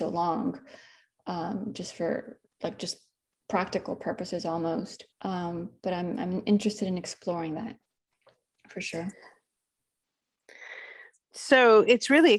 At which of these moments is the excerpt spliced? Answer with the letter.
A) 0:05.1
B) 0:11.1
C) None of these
A